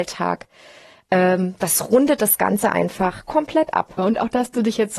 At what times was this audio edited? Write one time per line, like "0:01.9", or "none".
0:04.0